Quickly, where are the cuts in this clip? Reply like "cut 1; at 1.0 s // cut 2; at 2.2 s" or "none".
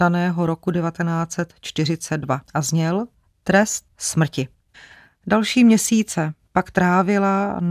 cut 1; at 2.4 s